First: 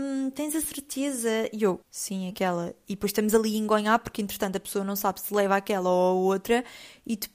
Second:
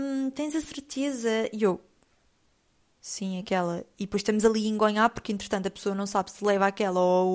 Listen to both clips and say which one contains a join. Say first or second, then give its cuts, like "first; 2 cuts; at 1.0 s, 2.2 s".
first; 1 cut; at 1.8 s